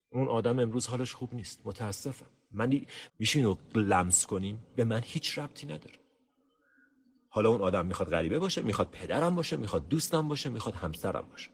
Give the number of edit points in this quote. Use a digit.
1